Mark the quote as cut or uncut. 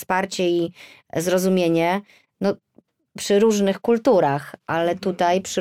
uncut